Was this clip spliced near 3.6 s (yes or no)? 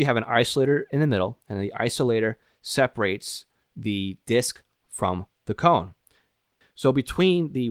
no